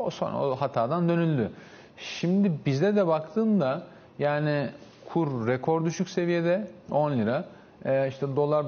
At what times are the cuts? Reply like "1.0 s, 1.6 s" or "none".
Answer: 6.9 s